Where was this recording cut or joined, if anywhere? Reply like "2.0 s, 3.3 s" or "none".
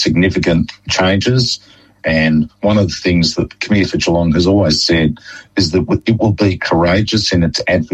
2.0 s